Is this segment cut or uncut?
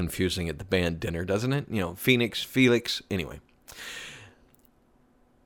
uncut